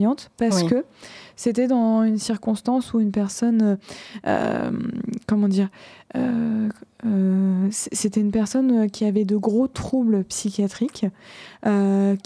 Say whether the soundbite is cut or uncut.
uncut